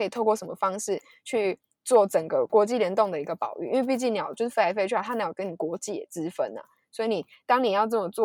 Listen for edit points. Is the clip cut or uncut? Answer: uncut